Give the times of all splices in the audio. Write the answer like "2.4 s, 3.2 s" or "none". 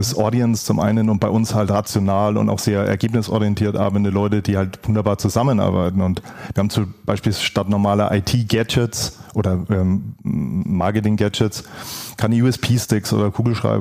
none